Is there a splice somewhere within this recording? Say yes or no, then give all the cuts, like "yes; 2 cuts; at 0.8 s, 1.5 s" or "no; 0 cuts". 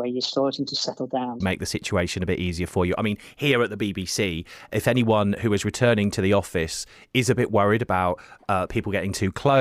yes; 1 cut; at 1.4 s